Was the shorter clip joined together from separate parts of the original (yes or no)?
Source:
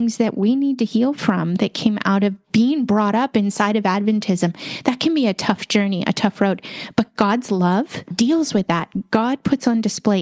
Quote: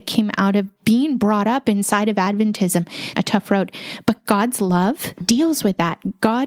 yes